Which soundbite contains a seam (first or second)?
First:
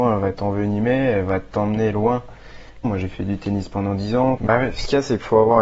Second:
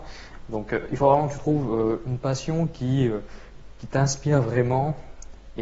first